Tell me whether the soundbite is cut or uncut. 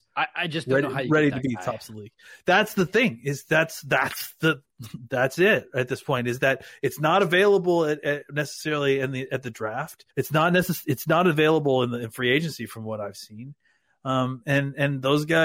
cut